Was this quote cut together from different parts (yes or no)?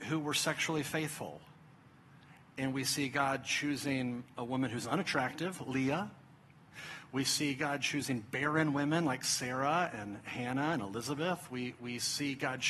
no